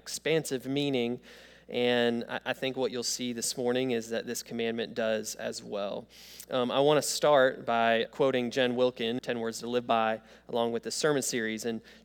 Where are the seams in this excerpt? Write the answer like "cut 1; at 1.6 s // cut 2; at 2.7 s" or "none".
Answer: cut 1; at 8.1 s // cut 2; at 9.2 s